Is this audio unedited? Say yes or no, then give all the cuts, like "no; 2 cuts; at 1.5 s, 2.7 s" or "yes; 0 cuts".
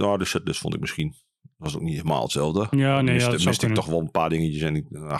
yes; 0 cuts